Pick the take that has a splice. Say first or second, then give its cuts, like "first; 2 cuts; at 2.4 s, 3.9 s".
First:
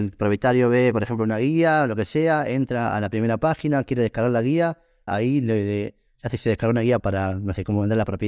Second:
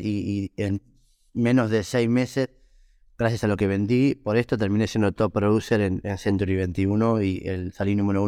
first; 2 cuts; at 5.1 s, 7.0 s